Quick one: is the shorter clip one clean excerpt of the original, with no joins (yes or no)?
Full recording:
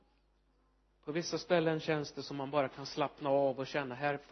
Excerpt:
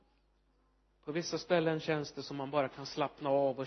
yes